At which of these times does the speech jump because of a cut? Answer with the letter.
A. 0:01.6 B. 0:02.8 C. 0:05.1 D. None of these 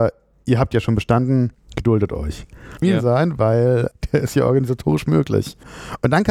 B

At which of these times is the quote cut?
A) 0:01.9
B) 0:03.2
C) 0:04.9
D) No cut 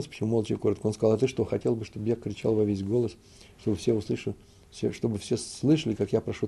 D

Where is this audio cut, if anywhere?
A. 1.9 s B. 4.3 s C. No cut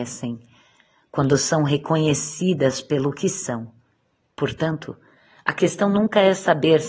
B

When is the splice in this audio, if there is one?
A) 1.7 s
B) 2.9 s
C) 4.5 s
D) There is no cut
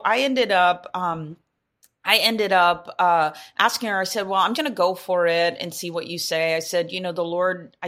C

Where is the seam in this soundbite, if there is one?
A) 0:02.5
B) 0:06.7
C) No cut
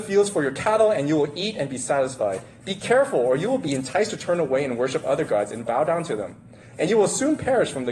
B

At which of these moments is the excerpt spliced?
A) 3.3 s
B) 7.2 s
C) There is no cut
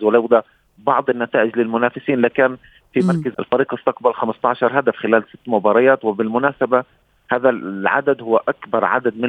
A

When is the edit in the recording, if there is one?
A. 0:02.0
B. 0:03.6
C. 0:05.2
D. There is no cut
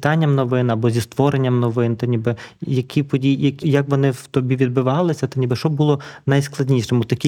B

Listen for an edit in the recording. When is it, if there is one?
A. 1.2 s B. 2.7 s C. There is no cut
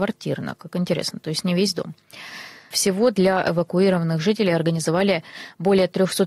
B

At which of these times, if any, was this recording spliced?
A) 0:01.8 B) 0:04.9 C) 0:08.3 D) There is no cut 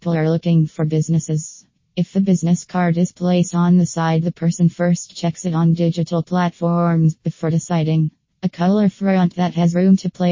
C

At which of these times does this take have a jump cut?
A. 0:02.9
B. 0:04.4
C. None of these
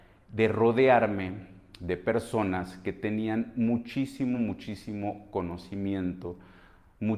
C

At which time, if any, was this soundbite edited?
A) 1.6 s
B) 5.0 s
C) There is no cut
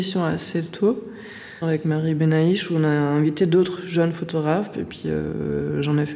A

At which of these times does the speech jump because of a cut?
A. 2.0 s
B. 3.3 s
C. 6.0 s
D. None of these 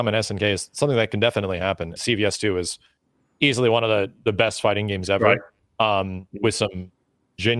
A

